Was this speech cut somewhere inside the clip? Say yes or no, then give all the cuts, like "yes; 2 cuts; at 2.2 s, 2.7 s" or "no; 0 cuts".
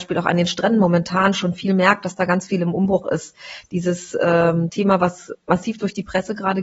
no; 0 cuts